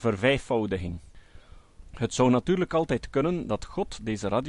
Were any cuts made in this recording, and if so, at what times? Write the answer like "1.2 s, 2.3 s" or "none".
1.8 s